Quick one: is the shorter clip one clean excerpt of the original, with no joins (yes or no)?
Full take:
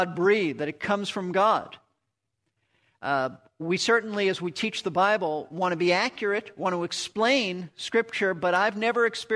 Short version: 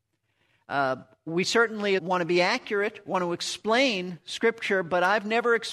no